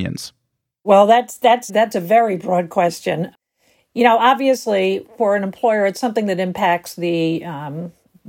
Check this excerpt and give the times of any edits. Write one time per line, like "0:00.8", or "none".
0:01.7